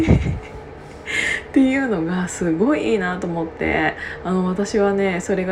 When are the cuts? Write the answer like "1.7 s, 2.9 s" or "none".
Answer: none